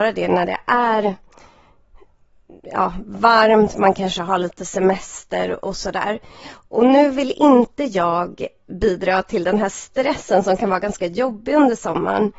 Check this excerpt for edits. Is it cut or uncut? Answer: uncut